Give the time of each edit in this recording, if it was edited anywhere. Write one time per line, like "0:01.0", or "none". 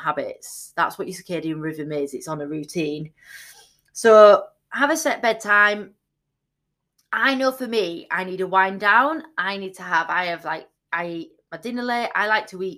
none